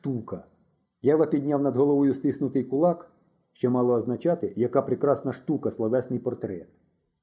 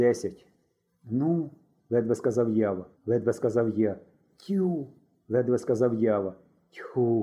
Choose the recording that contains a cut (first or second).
second